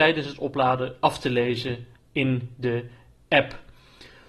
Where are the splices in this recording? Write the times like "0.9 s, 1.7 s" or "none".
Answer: none

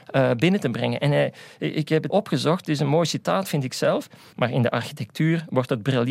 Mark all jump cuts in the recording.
2.1 s, 4.3 s

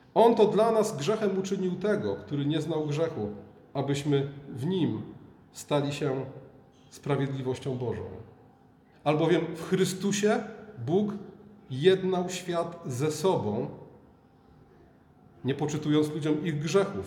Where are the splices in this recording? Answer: 8.9 s

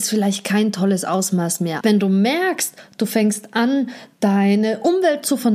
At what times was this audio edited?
1.8 s

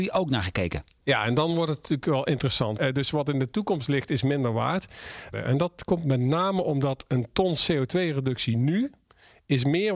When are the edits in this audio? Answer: 2.8 s, 5.3 s

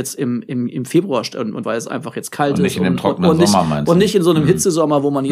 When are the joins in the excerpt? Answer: 1.6 s

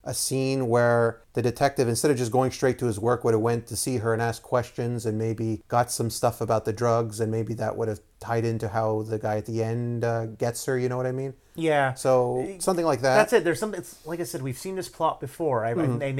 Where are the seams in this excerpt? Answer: none

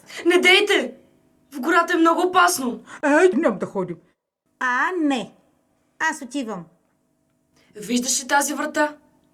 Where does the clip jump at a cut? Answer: 3.3 s

